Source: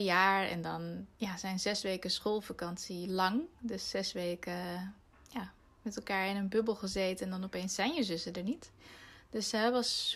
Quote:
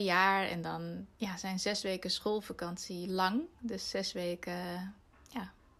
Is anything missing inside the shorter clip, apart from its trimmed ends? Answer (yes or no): no